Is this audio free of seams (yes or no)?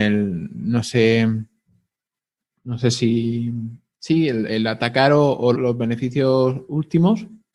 no